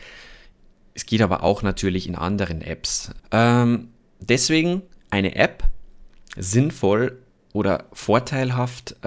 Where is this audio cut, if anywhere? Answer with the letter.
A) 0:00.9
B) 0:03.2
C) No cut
B